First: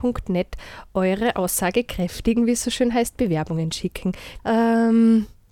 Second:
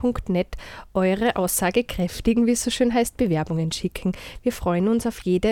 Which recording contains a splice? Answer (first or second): first